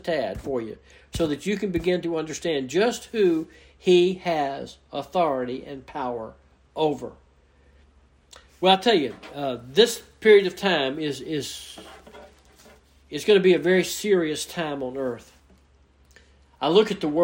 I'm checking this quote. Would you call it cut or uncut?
uncut